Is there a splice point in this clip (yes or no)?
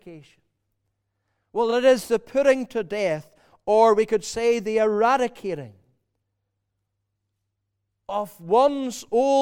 no